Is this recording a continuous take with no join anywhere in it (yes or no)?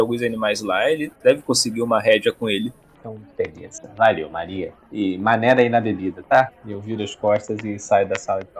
no